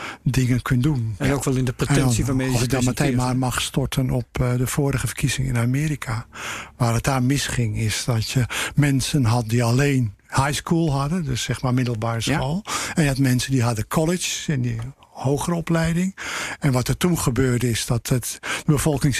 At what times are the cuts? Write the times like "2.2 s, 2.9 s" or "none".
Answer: none